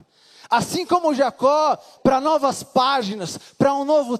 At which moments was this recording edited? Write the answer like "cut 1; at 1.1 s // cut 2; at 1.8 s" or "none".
cut 1; at 2.0 s

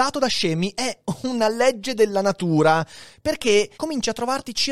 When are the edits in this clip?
cut 1; at 3.7 s

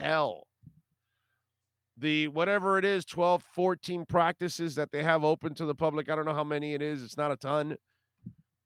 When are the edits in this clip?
cut 1; at 3.4 s

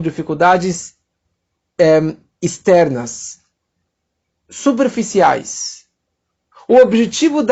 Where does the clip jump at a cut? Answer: cut 1; at 6.5 s

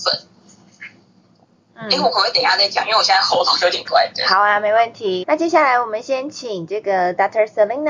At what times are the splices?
cut 1; at 3.8 s // cut 2; at 5.2 s

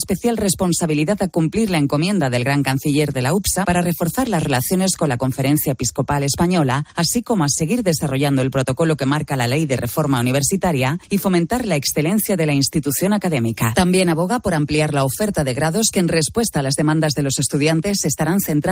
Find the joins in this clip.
cut 1; at 3.6 s // cut 2; at 13.7 s

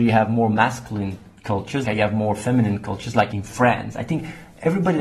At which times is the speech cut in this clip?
cut 1; at 1.8 s

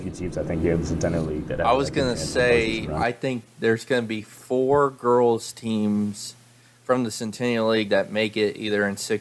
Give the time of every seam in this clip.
none

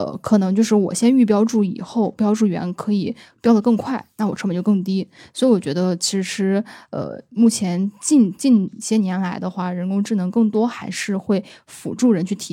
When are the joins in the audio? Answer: cut 1; at 8.4 s

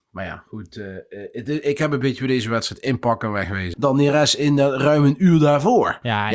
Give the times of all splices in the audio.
cut 1; at 3.7 s

